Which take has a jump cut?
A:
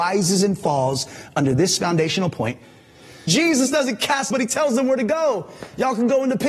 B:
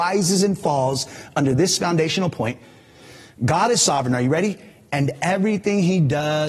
A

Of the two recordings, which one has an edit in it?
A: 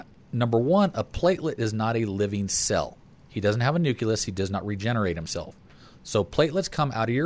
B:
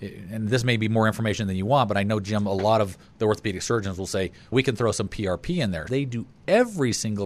B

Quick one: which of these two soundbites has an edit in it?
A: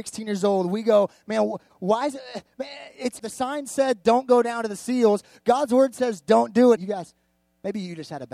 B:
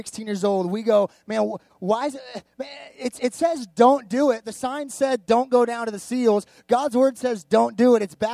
A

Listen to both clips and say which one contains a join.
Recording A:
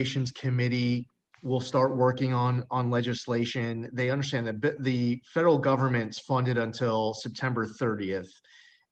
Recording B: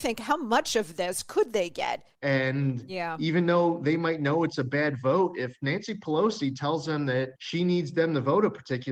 B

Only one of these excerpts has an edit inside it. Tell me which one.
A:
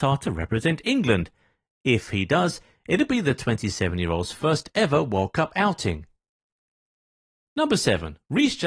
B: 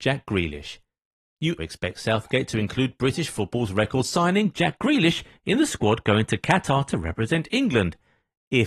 B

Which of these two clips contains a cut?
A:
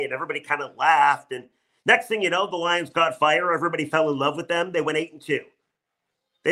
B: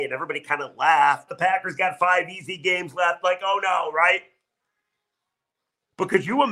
B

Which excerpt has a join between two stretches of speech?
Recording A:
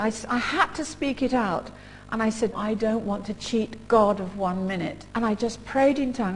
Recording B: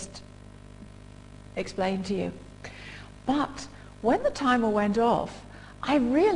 A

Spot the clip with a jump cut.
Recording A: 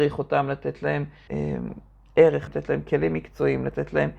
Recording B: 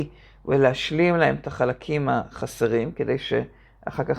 A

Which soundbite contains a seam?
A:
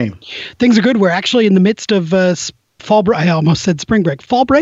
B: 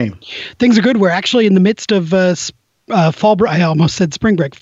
A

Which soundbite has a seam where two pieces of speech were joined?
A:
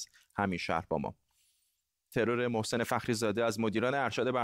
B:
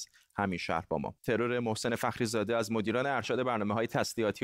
B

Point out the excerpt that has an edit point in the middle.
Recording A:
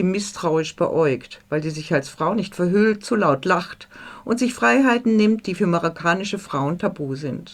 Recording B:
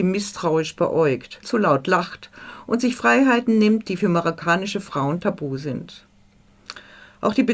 B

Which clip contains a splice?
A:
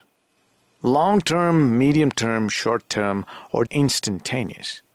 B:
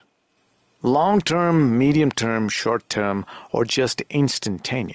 A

